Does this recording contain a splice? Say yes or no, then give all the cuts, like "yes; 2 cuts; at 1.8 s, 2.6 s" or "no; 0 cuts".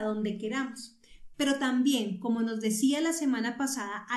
yes; 1 cut; at 1.3 s